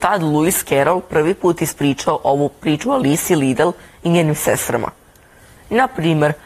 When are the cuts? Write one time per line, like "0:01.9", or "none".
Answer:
0:05.6